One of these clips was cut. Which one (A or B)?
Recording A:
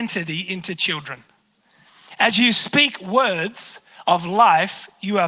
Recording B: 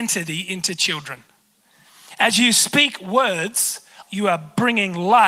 B